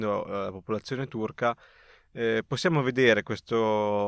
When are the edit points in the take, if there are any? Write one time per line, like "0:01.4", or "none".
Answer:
none